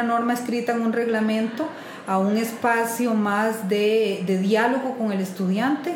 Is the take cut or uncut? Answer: uncut